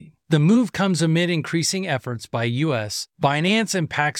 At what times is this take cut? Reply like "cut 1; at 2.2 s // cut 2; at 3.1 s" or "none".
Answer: cut 1; at 3.1 s